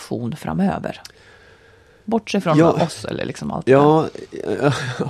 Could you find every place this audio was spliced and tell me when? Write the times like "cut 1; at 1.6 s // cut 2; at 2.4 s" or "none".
none